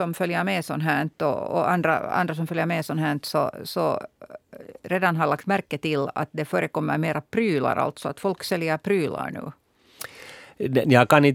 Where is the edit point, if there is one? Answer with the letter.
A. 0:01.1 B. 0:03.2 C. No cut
C